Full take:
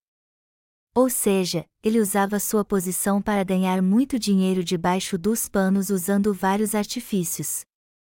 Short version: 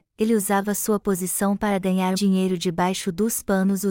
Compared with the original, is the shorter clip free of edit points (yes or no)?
no